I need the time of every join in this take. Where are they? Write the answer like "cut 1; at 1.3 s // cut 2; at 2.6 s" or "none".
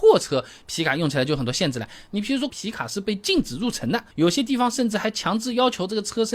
cut 1; at 2.5 s // cut 2; at 4.1 s